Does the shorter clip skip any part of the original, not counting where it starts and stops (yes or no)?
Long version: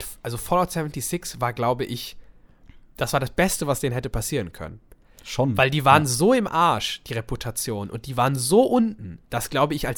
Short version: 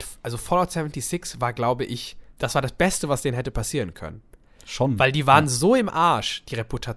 yes